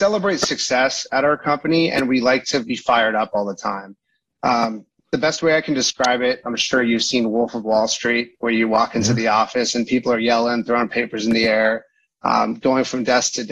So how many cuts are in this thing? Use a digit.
0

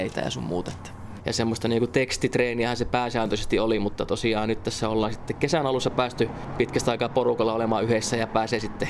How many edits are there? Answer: 1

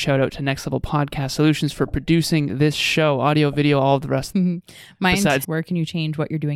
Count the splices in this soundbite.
2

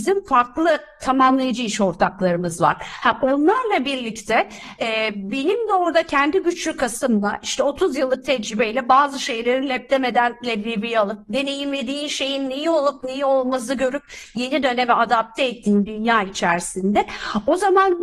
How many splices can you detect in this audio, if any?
0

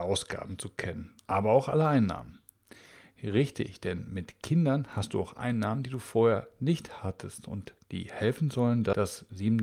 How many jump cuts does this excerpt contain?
0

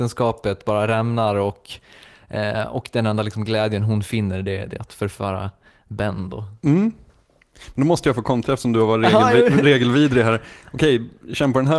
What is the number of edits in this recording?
0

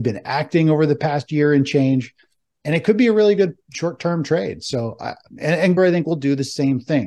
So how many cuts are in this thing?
1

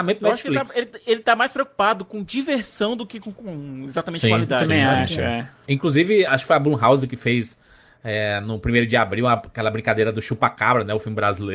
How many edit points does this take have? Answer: 1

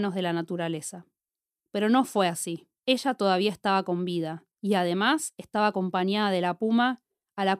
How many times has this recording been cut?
3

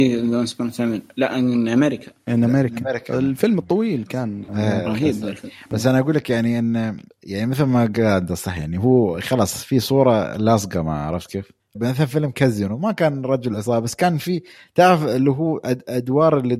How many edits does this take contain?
1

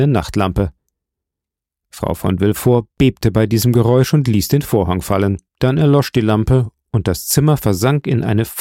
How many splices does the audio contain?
1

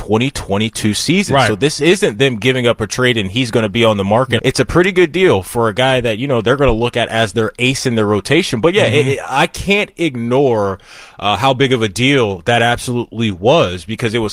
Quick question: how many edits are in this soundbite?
1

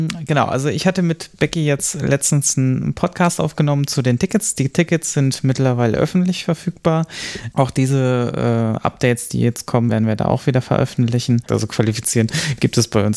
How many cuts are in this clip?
3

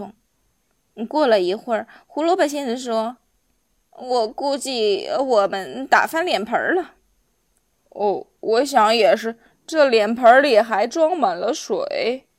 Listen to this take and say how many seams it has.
0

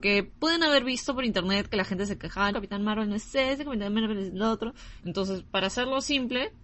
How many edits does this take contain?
2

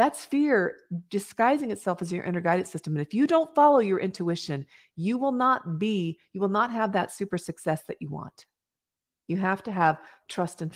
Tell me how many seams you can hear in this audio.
0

